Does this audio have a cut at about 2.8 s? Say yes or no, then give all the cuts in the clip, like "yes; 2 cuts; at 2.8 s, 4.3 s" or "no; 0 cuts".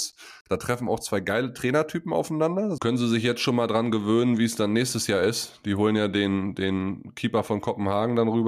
yes; 1 cut; at 2.8 s